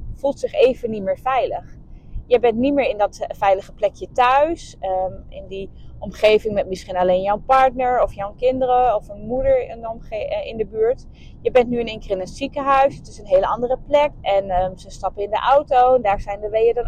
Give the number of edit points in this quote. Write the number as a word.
one